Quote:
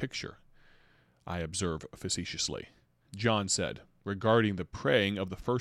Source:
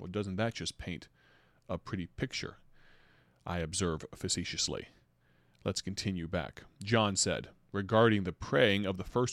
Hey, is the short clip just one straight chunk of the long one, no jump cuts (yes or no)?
no